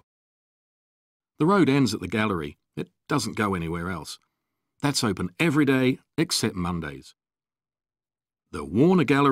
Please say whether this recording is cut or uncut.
cut